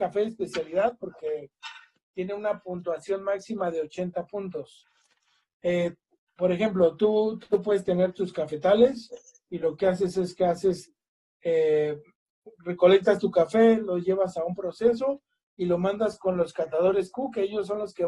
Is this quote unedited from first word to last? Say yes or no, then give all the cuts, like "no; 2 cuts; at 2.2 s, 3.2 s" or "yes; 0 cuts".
yes; 0 cuts